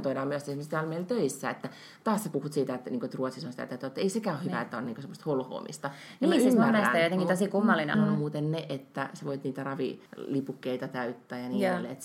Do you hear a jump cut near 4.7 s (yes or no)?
no